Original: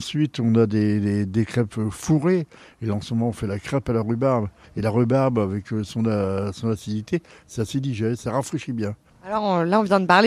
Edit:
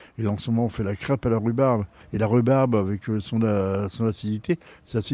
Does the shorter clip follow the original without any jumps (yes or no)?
yes